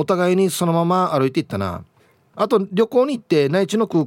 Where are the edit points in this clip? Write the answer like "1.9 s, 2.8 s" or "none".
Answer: 2.3 s

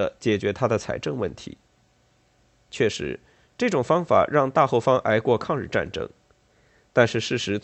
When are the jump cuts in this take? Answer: none

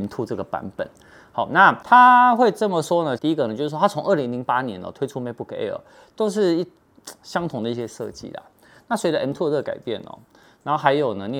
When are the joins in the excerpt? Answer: 3.2 s

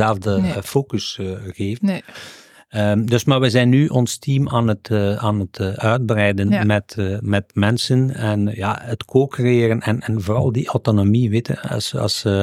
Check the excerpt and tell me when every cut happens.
none

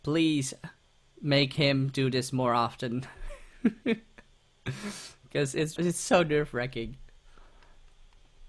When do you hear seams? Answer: 5.8 s

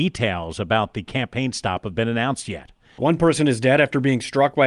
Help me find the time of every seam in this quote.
3.0 s

